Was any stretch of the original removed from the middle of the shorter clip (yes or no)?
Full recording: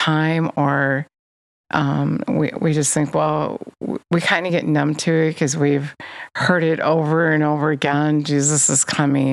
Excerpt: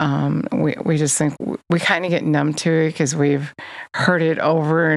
yes